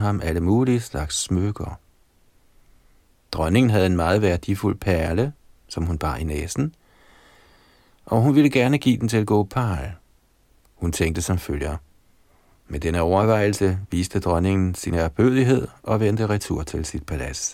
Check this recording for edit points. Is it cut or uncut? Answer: cut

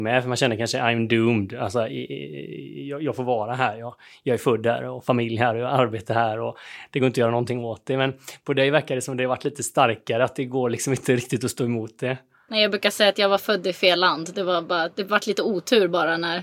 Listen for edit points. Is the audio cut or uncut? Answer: uncut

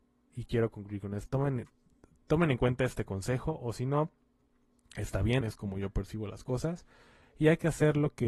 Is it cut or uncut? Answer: cut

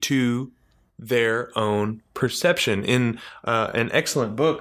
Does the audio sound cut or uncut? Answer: uncut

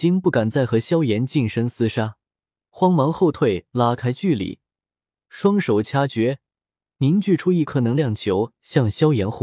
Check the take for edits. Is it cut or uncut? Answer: cut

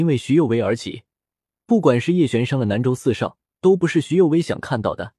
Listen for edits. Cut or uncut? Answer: cut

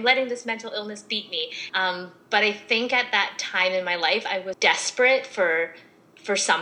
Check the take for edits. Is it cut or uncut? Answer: cut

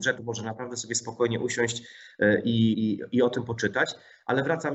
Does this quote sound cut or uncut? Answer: cut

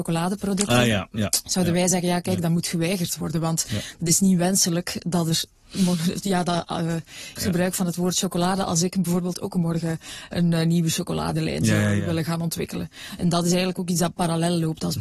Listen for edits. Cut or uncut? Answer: cut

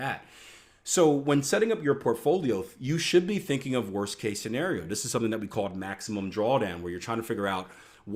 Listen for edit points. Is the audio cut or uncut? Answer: uncut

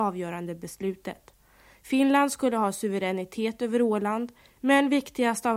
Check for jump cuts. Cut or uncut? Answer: uncut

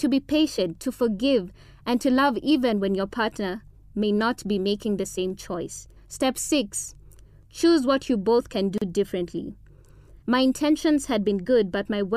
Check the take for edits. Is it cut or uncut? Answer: cut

